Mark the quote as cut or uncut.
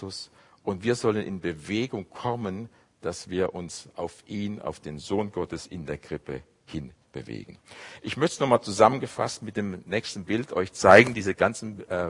uncut